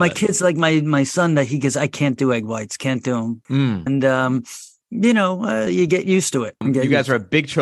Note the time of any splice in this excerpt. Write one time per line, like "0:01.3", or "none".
0:03.9
0:05.7